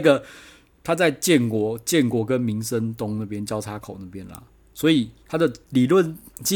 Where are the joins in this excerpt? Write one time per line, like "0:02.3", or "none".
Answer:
0:05.6